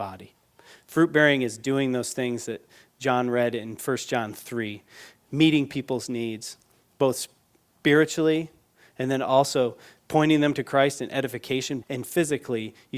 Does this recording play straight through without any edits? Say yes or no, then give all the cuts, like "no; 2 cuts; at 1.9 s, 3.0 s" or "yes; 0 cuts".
no; 1 cut; at 11.8 s